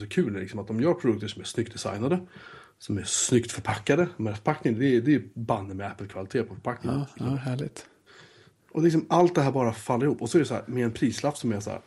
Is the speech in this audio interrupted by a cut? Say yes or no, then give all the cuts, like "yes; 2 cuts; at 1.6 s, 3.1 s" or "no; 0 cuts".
no; 0 cuts